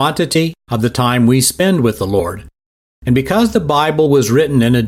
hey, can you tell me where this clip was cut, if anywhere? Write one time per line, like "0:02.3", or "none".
none

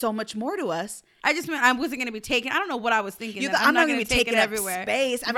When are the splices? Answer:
0:01.2

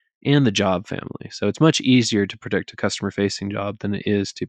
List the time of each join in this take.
none

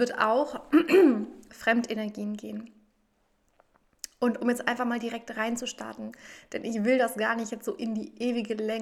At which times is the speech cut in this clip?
0:01.5

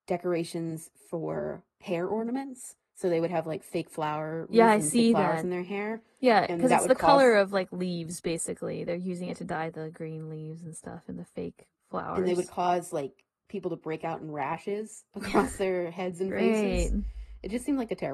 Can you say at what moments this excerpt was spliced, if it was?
none

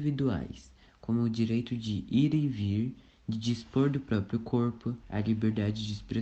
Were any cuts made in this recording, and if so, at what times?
0:05.0

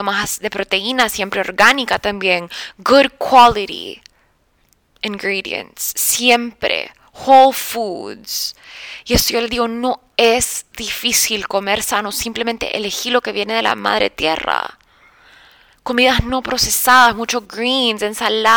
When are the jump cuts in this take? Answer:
none

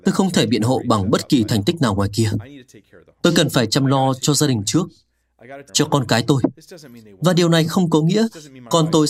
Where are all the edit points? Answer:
0:05.7

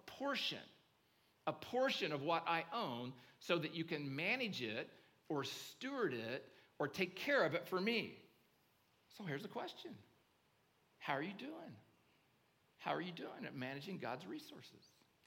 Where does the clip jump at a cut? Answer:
none

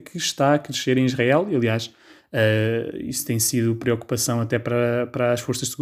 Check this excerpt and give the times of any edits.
none

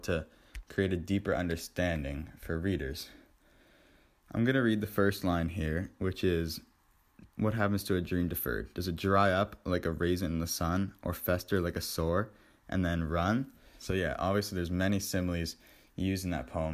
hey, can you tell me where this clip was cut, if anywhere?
0:07.3
0:13.8

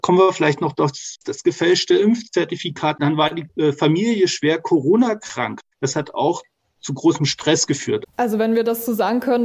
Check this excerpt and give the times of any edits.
0:08.1

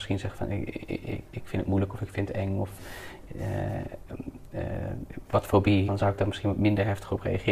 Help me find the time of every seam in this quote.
0:05.9

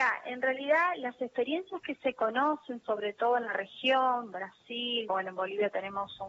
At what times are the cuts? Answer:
0:05.1

